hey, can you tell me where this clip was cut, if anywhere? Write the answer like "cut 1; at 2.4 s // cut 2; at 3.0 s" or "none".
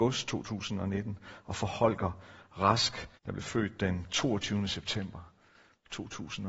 cut 1; at 3.2 s